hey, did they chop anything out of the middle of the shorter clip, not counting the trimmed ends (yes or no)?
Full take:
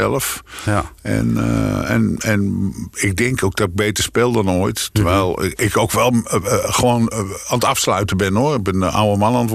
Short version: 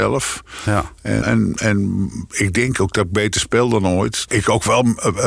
yes